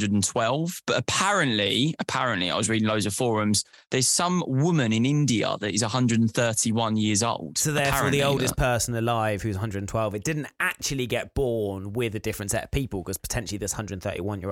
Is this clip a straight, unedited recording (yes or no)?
yes